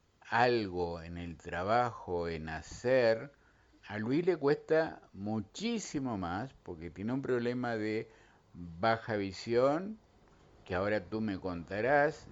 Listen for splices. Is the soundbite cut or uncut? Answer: cut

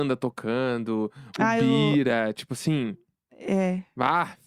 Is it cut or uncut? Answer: uncut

